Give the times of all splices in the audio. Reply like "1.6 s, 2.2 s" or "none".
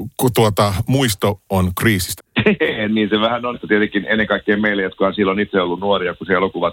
2.2 s, 3.5 s